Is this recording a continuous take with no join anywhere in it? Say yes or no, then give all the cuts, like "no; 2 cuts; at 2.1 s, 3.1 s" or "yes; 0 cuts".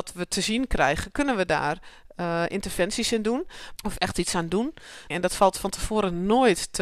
no; 2 cuts; at 3.8 s, 5.1 s